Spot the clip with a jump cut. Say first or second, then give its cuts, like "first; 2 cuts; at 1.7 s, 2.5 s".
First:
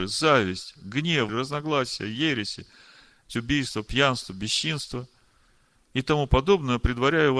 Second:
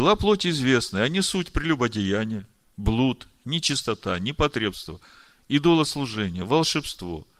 first; 2 cuts; at 1.3 s, 3.3 s